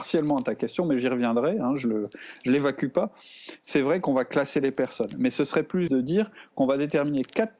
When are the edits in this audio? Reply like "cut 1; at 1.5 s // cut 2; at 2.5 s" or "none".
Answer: cut 1; at 5.9 s

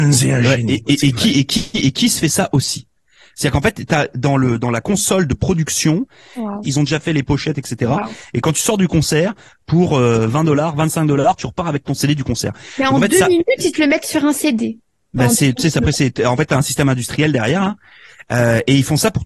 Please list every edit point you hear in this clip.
cut 1; at 6.6 s

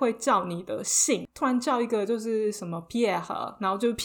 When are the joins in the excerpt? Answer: cut 1; at 1.3 s

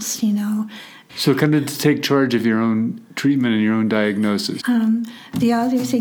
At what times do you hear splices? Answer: cut 1; at 1.1 s // cut 2; at 4.6 s

